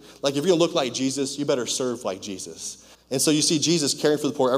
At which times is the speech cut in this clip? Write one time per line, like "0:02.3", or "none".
0:02.9